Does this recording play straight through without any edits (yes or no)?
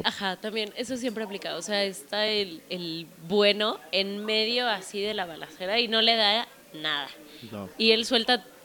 yes